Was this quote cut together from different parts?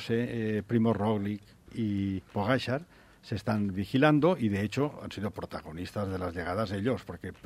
yes; 1 cut; at 1.7 s

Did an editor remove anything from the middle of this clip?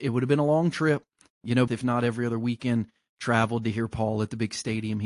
yes; 1 cut; at 1.7 s

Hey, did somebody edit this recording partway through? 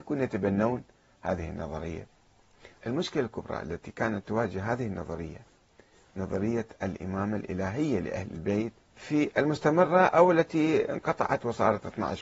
yes; 2 cuts; at 2.8 s, 8.8 s

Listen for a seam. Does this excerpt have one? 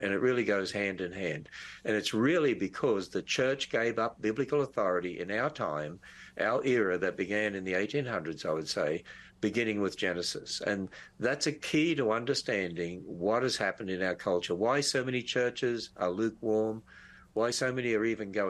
no; 0 cuts

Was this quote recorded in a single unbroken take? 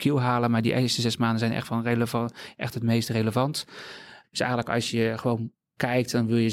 no; 2 cuts; at 1.6 s, 4.2 s

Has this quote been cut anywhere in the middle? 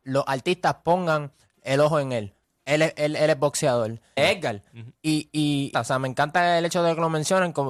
yes; 3 cuts; at 2.4 s, 4.2 s, 5.7 s

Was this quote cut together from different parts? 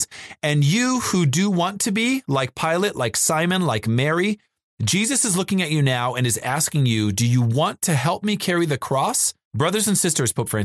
yes; 1 cut; at 9.4 s

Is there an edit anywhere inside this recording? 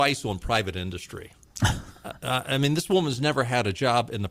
no; 0 cuts

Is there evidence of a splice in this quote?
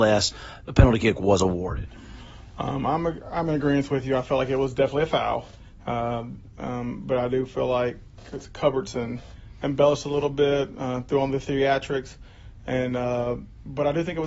no; 0 cuts

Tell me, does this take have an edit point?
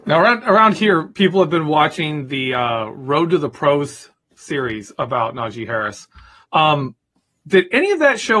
yes; 1 cut; at 6.4 s

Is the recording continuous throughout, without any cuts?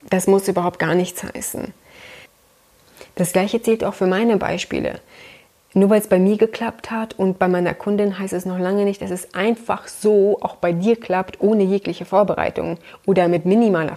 yes; 0 cuts

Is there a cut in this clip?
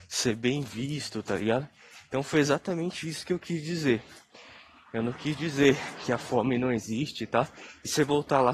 no; 0 cuts

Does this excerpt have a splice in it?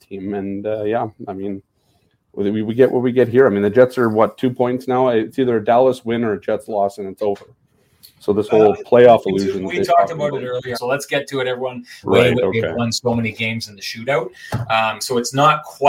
yes; 2 cuts; at 10.7 s, 12.0 s

